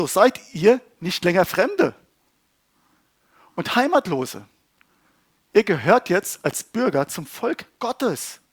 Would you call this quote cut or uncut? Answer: uncut